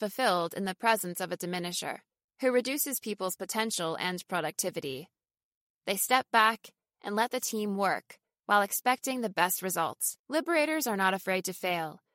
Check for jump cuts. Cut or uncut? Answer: cut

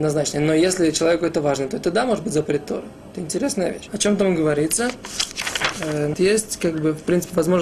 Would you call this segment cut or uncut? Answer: cut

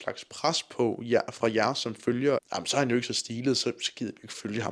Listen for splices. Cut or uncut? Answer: cut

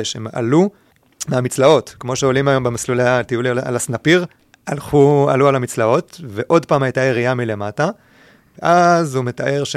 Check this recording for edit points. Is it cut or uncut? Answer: uncut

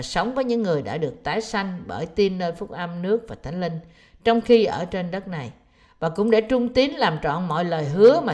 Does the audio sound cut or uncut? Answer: uncut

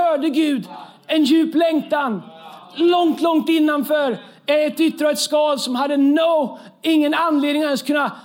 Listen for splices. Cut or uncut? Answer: uncut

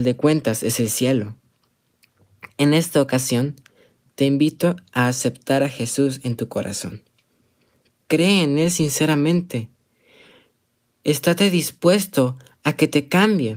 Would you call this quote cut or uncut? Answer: uncut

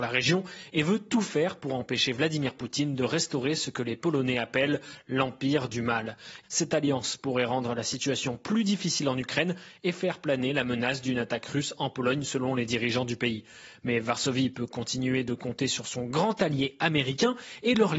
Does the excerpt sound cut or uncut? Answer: cut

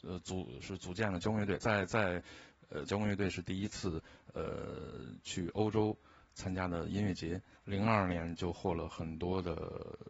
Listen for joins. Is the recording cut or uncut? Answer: cut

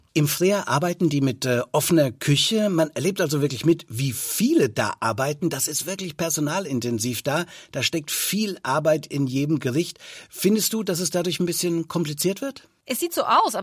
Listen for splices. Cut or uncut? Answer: uncut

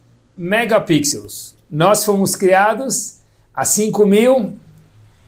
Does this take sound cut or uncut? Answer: cut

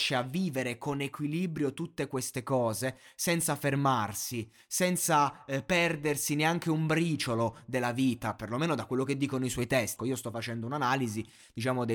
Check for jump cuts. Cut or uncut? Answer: cut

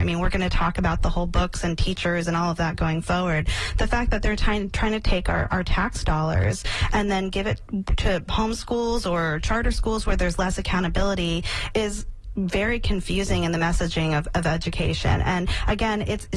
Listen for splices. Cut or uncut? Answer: uncut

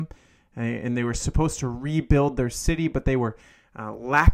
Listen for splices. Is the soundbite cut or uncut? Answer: uncut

